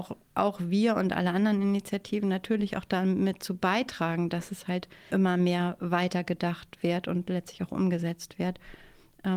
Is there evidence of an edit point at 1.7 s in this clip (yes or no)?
no